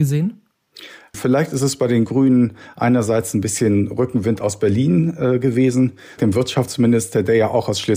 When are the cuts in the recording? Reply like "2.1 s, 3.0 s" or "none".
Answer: 1.1 s, 6.2 s